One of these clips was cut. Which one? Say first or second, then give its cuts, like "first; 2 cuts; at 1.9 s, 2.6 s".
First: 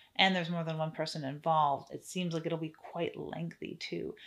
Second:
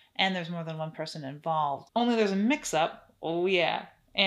second; 1 cut; at 1.9 s